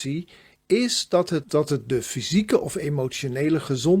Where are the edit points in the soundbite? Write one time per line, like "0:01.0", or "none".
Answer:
0:01.4

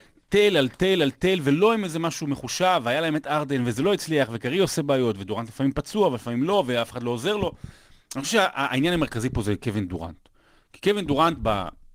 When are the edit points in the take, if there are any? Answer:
none

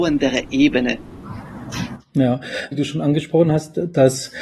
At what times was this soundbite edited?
0:02.7

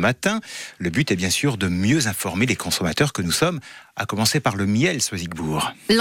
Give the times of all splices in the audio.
none

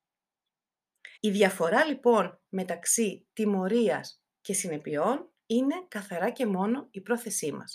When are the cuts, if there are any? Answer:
0:01.2

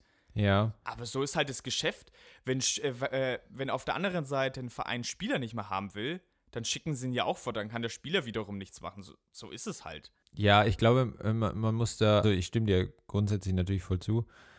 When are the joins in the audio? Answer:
0:12.2

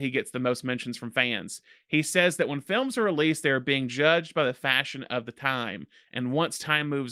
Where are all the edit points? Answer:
none

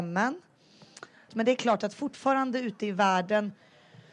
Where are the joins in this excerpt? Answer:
0:01.3

